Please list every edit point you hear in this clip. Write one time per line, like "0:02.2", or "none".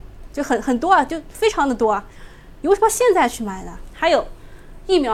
0:02.6